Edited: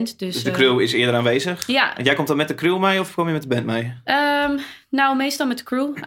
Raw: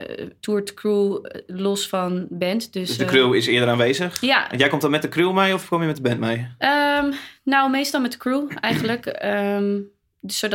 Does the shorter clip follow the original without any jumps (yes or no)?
yes